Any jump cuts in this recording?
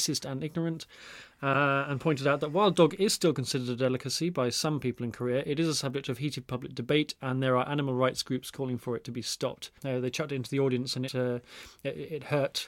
yes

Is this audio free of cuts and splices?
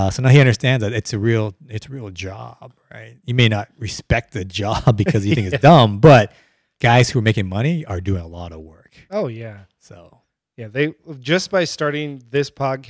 yes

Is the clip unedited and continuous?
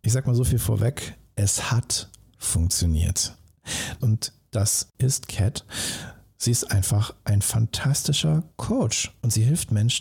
no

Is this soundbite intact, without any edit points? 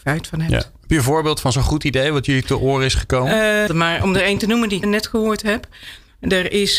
no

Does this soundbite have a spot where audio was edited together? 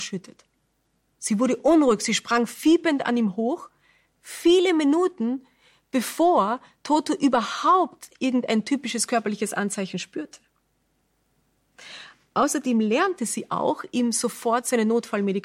no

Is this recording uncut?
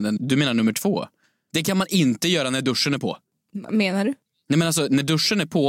yes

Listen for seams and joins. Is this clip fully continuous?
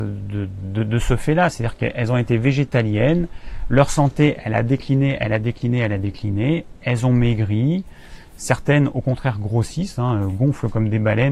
yes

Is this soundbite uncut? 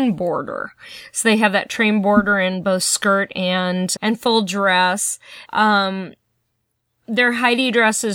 no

